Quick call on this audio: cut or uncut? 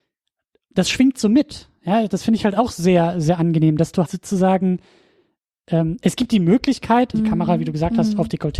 cut